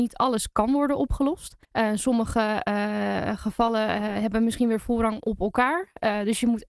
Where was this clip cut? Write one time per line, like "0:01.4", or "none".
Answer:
0:01.6